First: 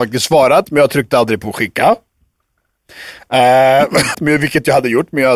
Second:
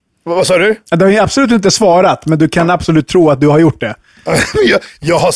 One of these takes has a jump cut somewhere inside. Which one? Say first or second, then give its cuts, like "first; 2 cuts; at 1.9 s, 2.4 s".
first; 1 cut; at 4.1 s